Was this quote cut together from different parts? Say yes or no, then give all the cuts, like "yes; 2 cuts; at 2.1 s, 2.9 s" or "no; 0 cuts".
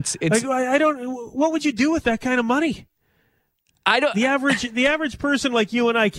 no; 0 cuts